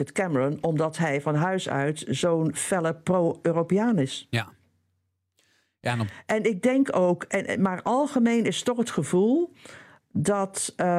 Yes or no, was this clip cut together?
no